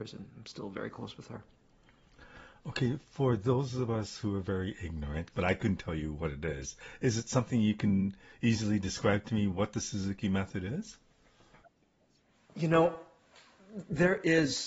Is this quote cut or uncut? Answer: cut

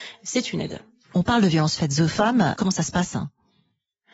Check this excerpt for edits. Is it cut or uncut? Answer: cut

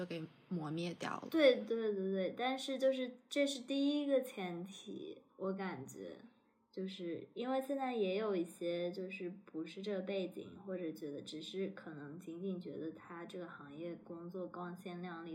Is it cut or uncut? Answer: uncut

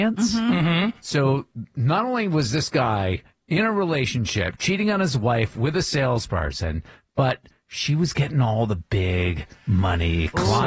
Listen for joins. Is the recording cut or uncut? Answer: uncut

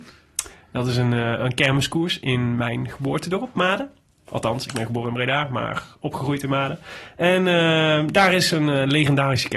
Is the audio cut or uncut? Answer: uncut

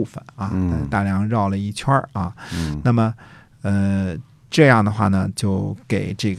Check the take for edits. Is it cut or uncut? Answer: uncut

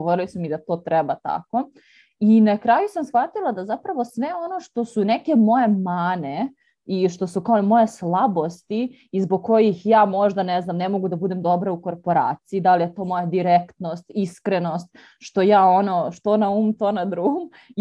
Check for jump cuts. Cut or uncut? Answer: uncut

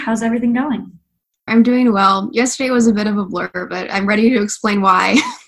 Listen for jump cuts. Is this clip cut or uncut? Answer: cut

